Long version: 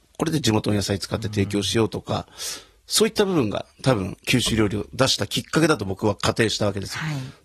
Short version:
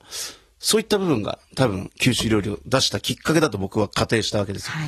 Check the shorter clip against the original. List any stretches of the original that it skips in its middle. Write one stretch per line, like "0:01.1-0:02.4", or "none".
none